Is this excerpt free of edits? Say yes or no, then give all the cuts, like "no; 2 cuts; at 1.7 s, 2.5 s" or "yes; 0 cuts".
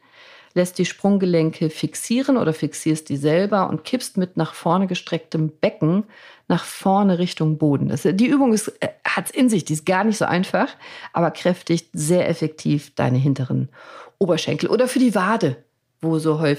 yes; 0 cuts